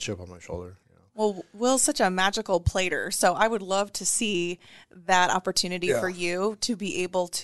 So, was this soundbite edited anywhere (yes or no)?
no